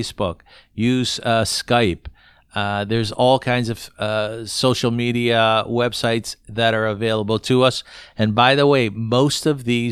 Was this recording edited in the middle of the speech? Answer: no; 0 cuts

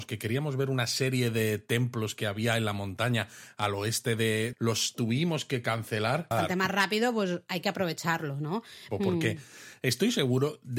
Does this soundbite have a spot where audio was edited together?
yes; 3 cuts; at 4.5 s, 6.3 s, 8.9 s

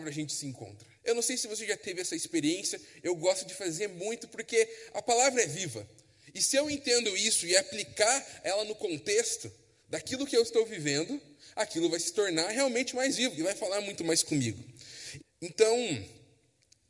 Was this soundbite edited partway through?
yes; 2 cuts; at 1.0 s, 15.2 s

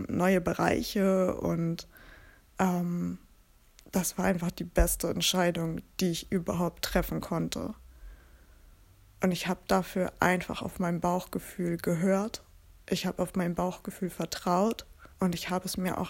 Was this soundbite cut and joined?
yes; 1 cut; at 15.1 s

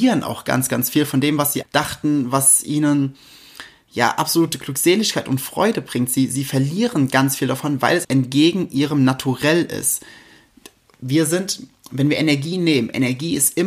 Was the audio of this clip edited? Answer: yes; 2 cuts; at 1.6 s, 8.0 s

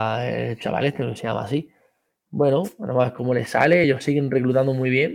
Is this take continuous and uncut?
yes; 0 cuts

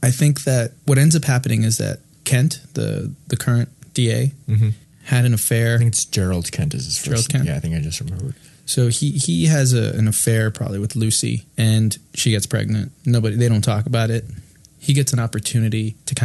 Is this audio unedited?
yes; 0 cuts

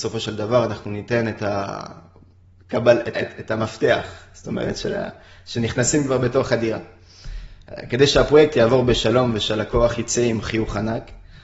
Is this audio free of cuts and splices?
no; 1 cut; at 3.1 s

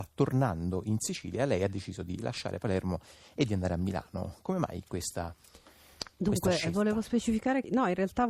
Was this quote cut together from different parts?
no; 0 cuts

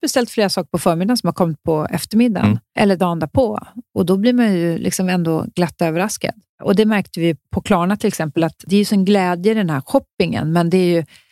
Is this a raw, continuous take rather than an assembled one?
yes; 0 cuts

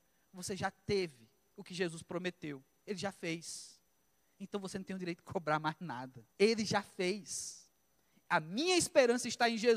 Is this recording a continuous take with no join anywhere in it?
no; 1 cut; at 6.3 s

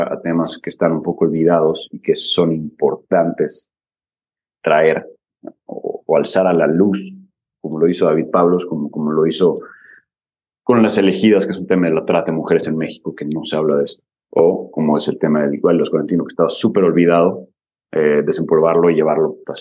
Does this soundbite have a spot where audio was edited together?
no; 0 cuts

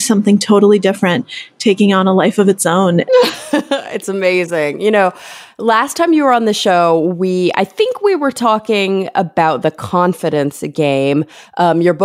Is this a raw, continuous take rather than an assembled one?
no; 1 cut; at 3.1 s

